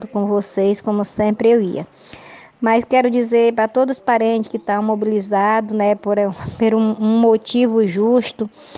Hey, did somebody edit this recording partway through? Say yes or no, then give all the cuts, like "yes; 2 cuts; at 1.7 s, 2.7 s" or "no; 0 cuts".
no; 0 cuts